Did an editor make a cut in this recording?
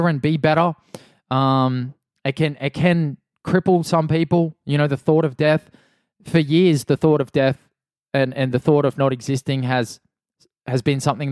no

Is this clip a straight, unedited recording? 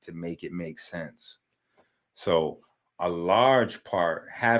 yes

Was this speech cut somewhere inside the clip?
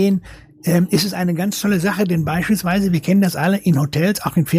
no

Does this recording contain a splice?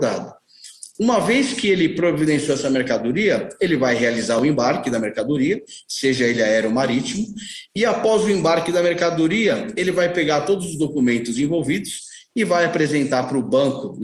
no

